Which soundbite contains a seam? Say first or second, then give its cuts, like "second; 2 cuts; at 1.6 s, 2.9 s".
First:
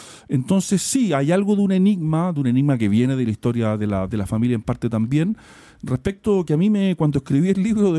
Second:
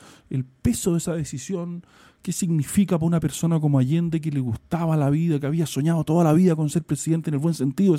first; 2 cuts; at 2.3 s, 4.1 s